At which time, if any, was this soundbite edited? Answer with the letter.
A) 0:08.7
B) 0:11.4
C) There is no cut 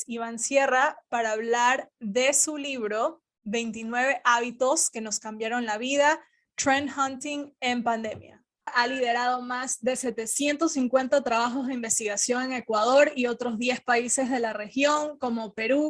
A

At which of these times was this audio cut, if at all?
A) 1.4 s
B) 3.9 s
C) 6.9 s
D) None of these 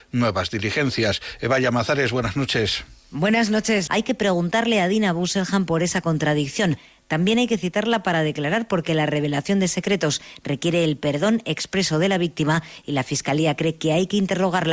B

